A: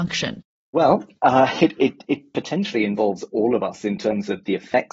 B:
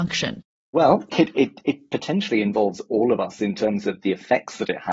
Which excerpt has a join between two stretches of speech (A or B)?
B